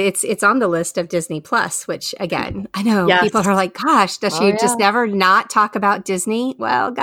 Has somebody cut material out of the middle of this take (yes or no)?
no